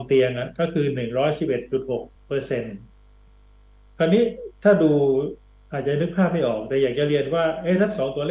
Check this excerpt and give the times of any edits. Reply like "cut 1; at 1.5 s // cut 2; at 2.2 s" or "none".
cut 1; at 2.2 s

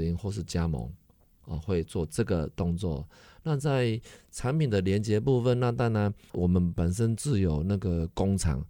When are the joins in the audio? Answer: none

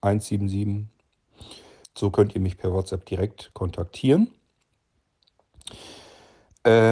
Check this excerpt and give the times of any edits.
cut 1; at 1.8 s

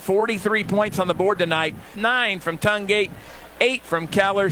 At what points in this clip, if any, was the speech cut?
cut 1; at 1.9 s

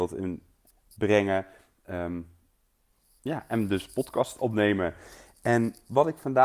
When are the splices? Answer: none

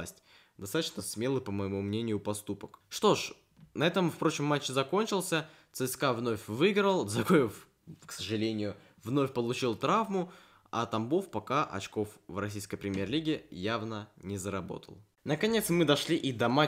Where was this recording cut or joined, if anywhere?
none

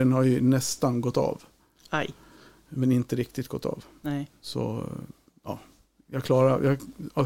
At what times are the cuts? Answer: none

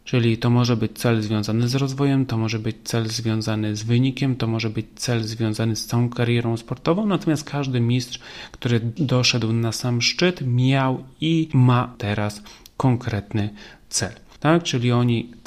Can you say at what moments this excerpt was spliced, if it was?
cut 1; at 14.4 s

